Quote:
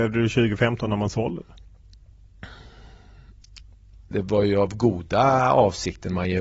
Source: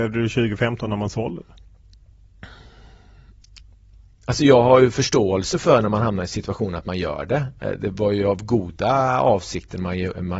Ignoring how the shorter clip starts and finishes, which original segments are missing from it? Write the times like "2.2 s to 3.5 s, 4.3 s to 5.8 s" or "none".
4.1 s to 7.8 s